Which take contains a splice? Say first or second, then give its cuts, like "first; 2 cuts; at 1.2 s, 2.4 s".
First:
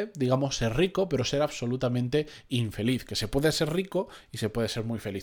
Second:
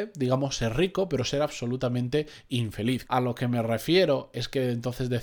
second; 1 cut; at 3.0 s